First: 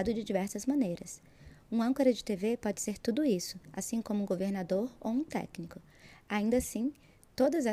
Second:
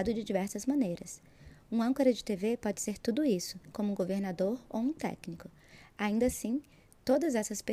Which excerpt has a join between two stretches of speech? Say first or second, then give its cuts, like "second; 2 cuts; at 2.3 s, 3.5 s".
second; 1 cut; at 3.7 s